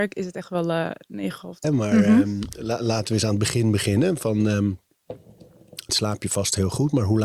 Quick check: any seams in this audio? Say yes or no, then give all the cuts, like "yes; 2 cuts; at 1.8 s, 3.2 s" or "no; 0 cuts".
yes; 2 cuts; at 1.6 s, 5.9 s